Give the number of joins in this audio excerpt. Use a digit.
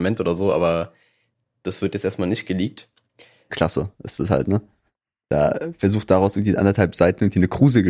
1